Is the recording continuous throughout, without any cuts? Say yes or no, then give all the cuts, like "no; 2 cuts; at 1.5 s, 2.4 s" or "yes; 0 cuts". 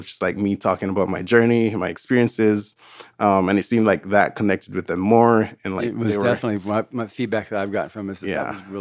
yes; 0 cuts